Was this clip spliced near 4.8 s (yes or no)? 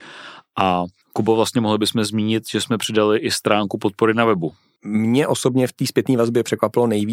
yes